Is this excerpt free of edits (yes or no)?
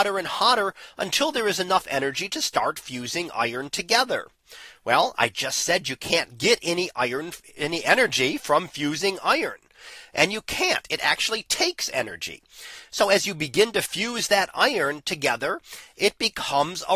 yes